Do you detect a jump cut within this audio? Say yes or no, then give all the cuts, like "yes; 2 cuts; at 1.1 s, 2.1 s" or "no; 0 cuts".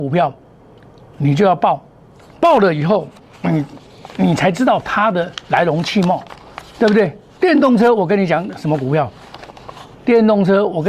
yes; 1 cut; at 7.3 s